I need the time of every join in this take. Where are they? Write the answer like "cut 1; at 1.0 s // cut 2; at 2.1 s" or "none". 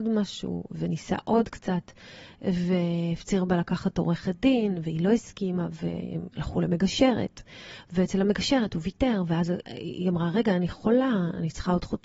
cut 1; at 9.6 s